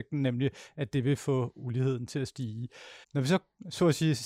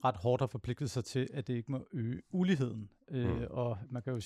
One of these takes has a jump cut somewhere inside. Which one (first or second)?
first